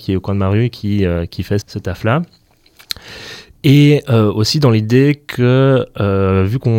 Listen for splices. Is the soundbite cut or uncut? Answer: cut